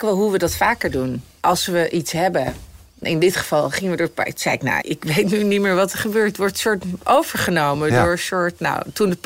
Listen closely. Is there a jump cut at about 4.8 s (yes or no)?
yes